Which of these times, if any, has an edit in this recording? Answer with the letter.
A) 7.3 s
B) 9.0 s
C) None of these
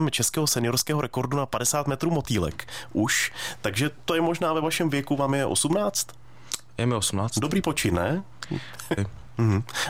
B